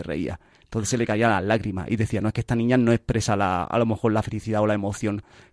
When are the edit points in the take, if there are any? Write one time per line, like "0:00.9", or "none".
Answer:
none